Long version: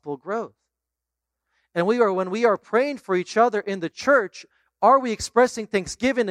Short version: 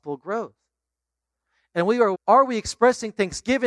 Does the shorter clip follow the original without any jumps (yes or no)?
no